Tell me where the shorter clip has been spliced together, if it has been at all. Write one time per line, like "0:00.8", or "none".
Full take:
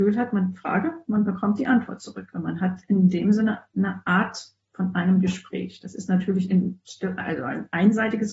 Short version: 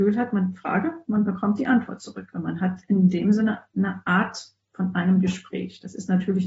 none